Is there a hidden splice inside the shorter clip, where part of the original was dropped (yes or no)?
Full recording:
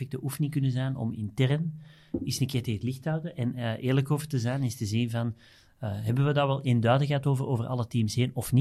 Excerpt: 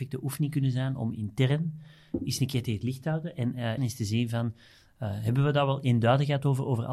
yes